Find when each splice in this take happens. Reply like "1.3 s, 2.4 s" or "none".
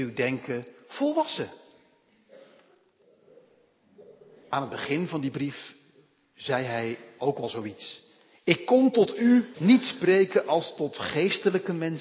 9.5 s